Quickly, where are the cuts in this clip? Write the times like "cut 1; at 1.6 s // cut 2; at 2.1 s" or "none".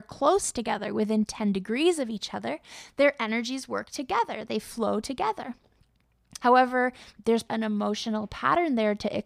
cut 1; at 6.4 s // cut 2; at 7.5 s